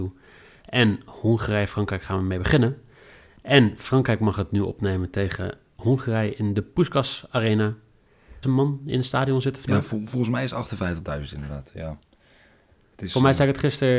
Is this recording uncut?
no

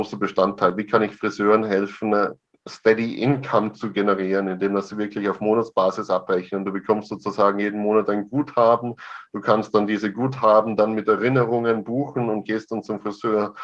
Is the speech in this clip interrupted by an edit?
no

